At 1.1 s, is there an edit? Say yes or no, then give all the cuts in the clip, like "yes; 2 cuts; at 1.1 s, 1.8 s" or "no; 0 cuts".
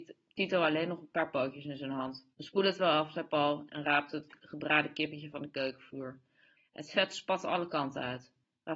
no; 2 cuts; at 2.3 s, 6.6 s